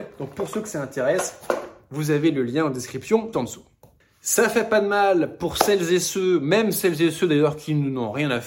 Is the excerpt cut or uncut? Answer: cut